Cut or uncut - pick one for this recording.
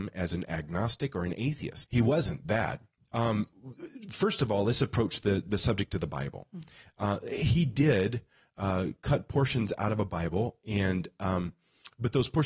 cut